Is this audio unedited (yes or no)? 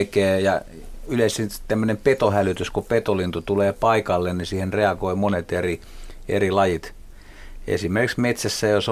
yes